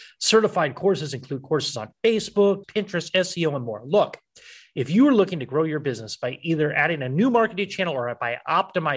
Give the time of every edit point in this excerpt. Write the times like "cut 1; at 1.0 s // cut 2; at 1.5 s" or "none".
cut 1; at 2.6 s